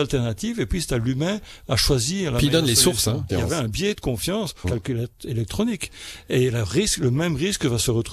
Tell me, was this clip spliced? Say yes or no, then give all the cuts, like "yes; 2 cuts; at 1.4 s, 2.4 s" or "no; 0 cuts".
yes; 2 cuts; at 3.3 s, 4.6 s